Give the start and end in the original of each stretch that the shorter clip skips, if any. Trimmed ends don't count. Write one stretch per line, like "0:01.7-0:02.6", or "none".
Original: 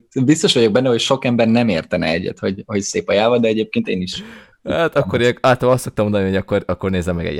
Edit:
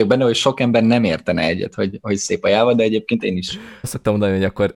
0:04.5-0:05.8